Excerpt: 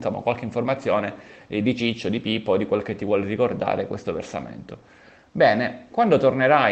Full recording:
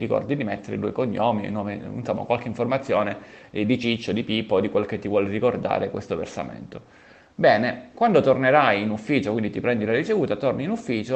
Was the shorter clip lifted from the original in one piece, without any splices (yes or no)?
yes